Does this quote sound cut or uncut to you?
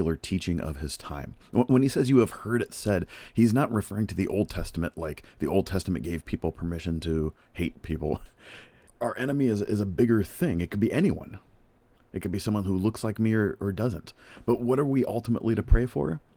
cut